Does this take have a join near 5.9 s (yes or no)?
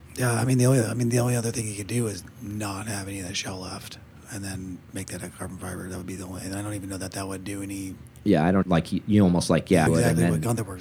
no